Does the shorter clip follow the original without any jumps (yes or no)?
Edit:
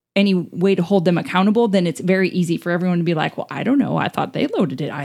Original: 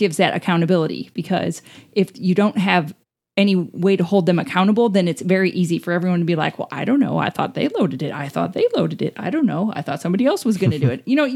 yes